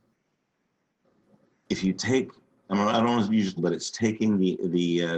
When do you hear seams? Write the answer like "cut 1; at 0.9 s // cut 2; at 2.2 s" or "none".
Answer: cut 1; at 3.6 s